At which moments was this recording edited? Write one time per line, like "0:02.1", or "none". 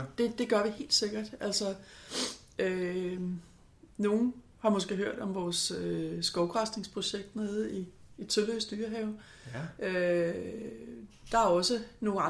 none